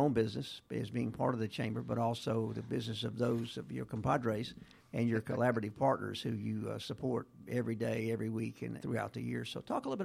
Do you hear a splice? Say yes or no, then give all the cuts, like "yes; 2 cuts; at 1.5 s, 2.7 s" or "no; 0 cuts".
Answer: yes; 1 cut; at 8.8 s